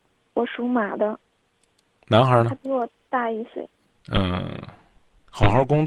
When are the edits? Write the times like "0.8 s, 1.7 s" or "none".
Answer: 2.0 s, 3.9 s